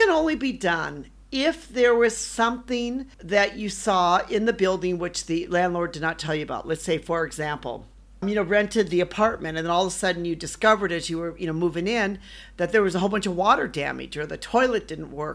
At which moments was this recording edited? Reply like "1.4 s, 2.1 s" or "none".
3.1 s, 8.2 s